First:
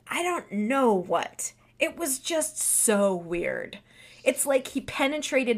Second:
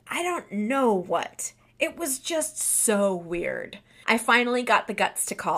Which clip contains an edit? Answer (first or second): second